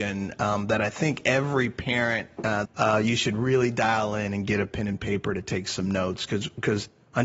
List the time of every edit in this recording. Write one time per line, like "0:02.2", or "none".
0:02.6